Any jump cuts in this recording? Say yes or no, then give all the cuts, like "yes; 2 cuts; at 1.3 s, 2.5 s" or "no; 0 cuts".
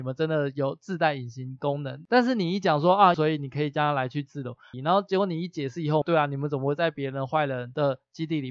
yes; 3 cuts; at 3.1 s, 4.7 s, 6.0 s